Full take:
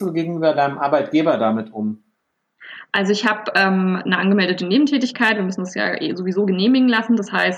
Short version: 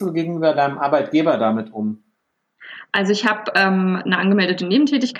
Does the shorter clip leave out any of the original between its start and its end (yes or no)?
no